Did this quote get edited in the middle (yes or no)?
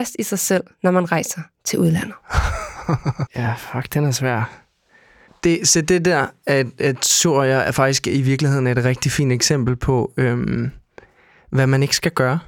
yes